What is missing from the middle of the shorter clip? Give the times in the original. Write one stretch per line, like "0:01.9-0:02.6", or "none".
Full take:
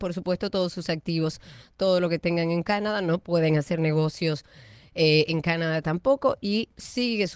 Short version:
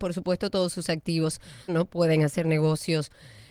0:01.7-0:03.0